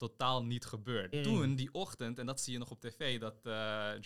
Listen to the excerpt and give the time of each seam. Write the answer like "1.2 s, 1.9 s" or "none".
1.1 s

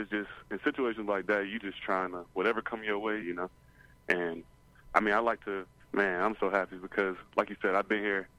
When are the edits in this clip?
3.2 s, 5.8 s

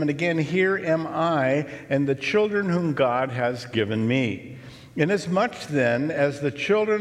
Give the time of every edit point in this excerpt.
none

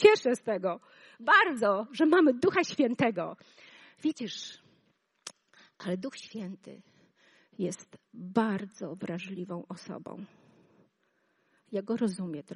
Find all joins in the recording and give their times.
none

